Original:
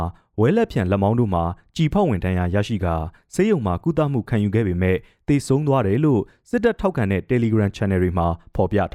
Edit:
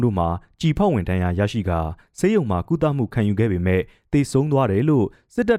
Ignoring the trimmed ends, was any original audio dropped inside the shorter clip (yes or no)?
no